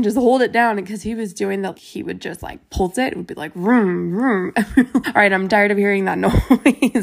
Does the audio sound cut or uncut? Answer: cut